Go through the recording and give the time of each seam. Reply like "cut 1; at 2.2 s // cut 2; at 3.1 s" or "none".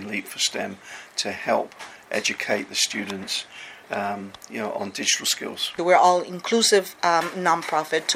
cut 1; at 3.8 s // cut 2; at 5.8 s